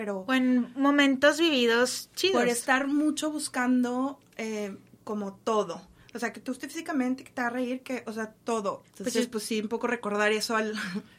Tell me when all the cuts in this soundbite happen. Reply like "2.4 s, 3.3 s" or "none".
6.3 s, 8.8 s